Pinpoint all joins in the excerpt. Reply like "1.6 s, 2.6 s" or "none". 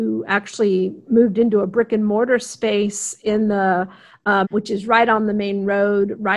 4.4 s